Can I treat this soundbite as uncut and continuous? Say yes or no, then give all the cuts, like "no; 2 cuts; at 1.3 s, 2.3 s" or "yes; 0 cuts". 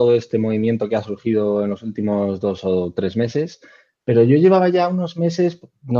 yes; 0 cuts